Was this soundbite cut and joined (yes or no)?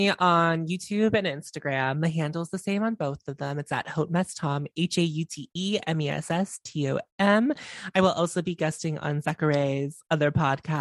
no